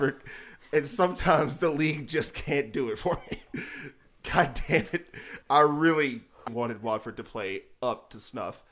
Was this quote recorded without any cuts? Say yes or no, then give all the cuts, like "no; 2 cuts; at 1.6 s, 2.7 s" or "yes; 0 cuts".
no; 2 cuts; at 5.4 s, 6.5 s